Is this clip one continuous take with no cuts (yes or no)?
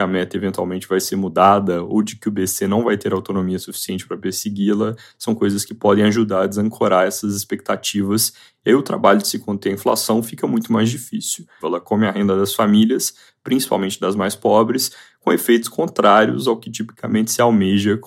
no